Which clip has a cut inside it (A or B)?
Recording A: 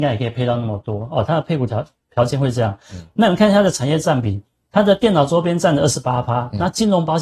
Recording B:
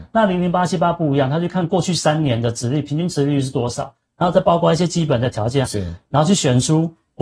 B